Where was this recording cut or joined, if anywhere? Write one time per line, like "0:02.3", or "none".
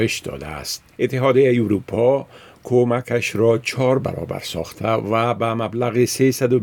0:00.9